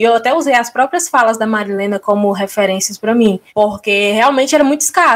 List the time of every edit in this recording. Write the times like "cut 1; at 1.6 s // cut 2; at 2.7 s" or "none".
cut 1; at 3.5 s

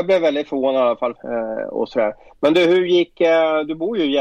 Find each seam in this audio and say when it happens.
cut 1; at 1.2 s

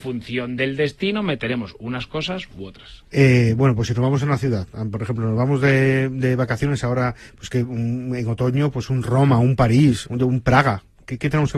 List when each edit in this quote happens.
cut 1; at 3.1 s // cut 2; at 10.0 s

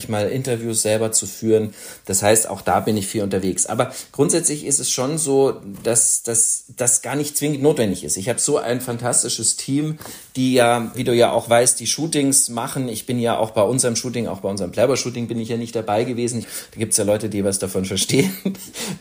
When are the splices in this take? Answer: cut 1; at 10.9 s // cut 2; at 16.4 s

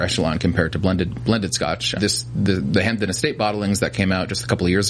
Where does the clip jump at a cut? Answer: cut 1; at 2.0 s

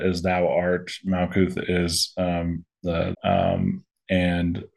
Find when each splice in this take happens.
cut 1; at 3.1 s

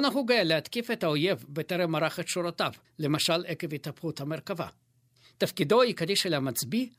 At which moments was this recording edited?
cut 1; at 2.8 s // cut 2; at 5.2 s

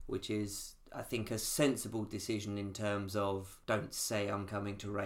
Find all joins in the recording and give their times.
cut 1; at 3.6 s

